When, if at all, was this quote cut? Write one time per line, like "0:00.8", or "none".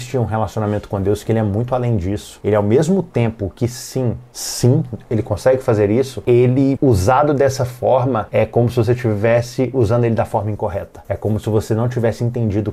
0:04.3